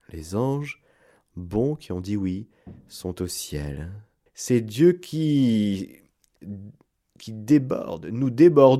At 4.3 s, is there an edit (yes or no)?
yes